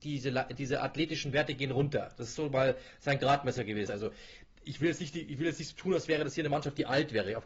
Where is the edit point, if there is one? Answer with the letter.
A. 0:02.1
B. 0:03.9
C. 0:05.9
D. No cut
B